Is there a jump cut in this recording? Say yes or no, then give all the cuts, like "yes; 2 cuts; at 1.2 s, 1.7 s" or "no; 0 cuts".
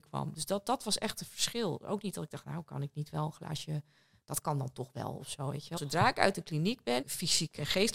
yes; 2 cuts; at 5.8 s, 7.0 s